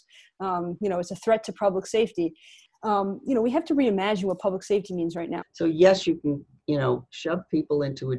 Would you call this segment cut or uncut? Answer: cut